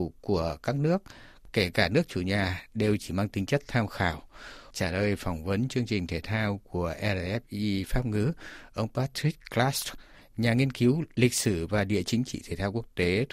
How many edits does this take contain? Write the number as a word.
one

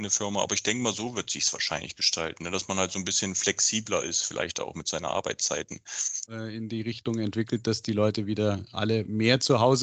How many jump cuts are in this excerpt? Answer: one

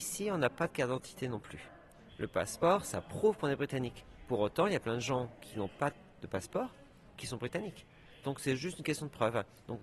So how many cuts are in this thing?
one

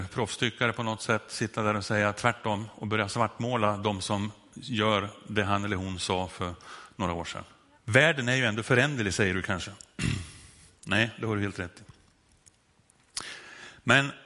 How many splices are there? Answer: two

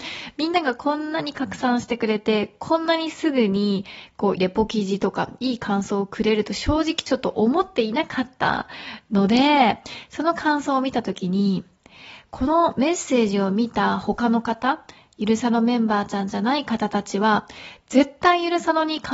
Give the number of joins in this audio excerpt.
one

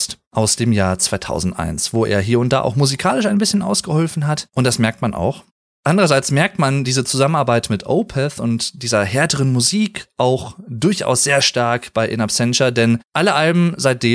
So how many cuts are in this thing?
zero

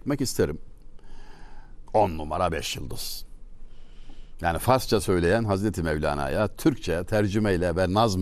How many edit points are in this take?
one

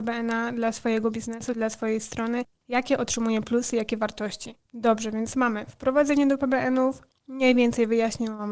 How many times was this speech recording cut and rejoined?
one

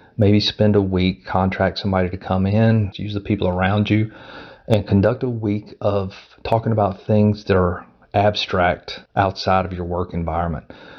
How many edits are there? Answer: two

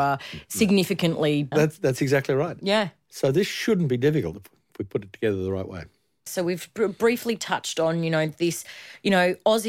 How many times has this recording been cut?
two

